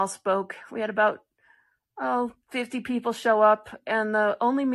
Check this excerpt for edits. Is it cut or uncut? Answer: cut